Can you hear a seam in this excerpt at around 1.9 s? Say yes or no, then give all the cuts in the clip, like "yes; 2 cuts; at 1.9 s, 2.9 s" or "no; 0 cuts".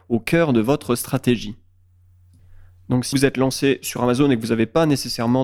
no; 1 cut; at 3.1 s